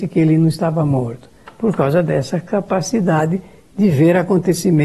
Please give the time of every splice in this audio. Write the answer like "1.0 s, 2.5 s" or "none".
none